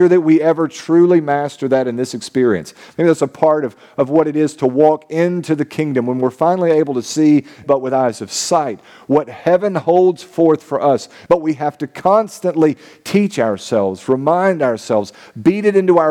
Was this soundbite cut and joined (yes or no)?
yes